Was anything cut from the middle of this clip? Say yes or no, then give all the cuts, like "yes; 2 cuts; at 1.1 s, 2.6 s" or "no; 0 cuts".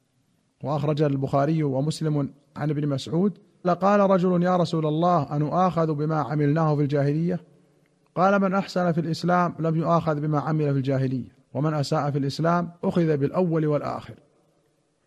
yes; 3 cuts; at 3.6 s, 11.4 s, 12.7 s